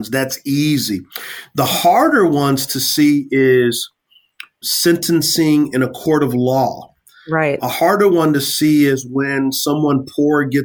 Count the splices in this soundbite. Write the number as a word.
zero